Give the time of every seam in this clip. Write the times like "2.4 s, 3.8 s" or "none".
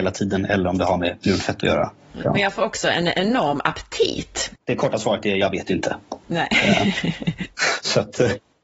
2.2 s, 4.5 s